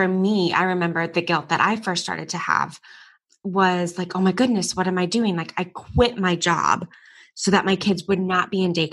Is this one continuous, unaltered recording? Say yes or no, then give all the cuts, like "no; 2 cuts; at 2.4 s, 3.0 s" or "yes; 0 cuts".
yes; 0 cuts